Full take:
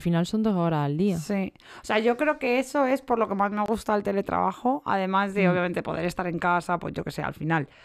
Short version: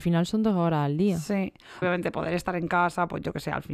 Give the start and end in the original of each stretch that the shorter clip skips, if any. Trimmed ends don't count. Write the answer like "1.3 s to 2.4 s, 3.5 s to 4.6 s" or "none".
1.8 s to 5.5 s

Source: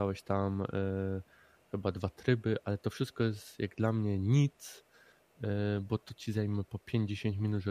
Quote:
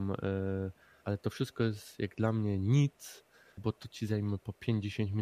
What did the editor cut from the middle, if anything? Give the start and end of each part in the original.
1.5 s to 2.6 s, 5.2 s to 5.8 s

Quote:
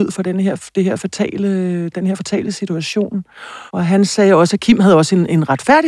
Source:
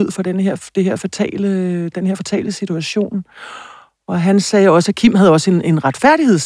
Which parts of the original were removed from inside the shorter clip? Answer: 3.7 s to 4.0 s

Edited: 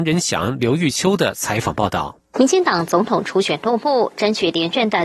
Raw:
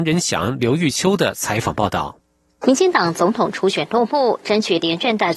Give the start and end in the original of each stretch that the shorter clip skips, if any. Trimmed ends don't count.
2.3 s to 2.6 s

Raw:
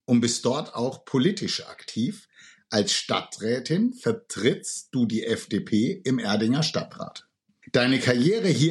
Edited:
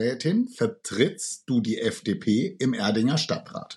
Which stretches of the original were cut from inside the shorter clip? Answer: none

